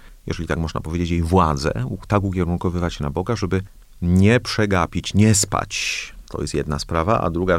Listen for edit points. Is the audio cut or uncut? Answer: uncut